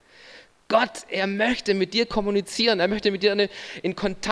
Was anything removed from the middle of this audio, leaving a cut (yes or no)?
no